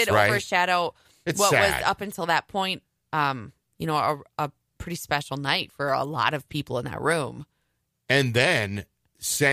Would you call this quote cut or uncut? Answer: uncut